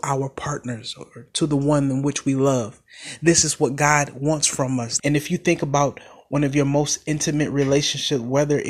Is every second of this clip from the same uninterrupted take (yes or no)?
no